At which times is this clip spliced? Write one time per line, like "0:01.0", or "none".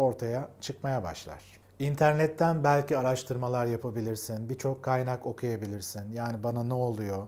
none